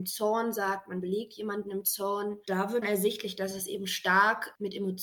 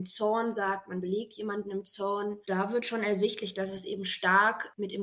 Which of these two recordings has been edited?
first; 1 cut; at 2.8 s

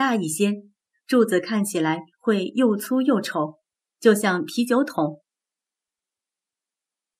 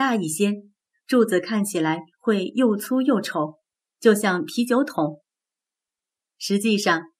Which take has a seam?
second; 1 cut; at 6.2 s

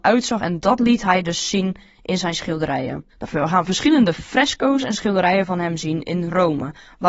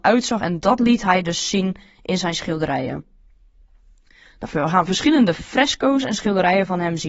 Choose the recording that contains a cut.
first; 1 cut; at 3.1 s

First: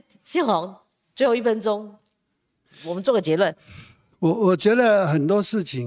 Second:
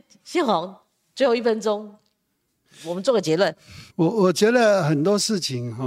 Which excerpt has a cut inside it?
second; 1 cut; at 3.9 s

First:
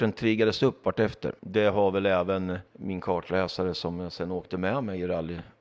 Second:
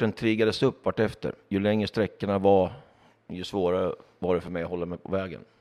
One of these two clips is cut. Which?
first; 2 cuts; at 1.4 s, 2.7 s

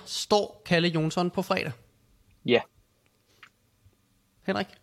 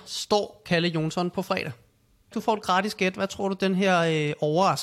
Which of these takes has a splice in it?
second; 1 cut; at 2.3 s

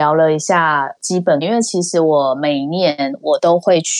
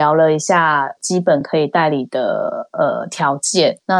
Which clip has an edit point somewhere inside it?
first; 1 cut; at 1.4 s

